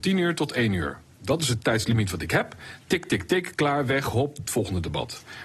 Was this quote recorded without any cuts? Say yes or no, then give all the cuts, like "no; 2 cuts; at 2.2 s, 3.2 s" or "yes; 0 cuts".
yes; 0 cuts